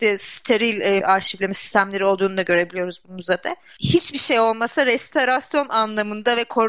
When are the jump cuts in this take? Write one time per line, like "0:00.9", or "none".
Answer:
0:01.0